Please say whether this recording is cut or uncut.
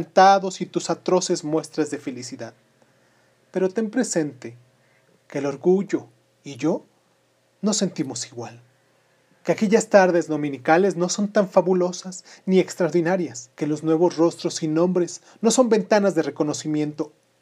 cut